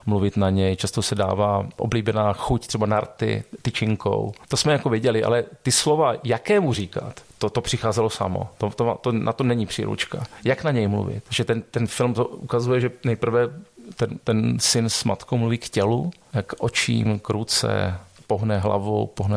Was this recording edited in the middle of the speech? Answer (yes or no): yes